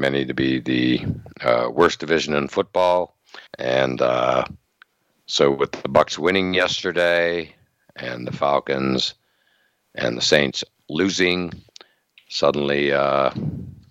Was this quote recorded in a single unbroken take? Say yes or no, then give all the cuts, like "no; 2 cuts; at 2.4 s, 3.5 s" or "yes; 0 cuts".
no; 1 cut; at 3.5 s